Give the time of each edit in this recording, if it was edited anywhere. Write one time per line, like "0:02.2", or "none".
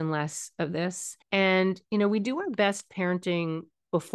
0:01.2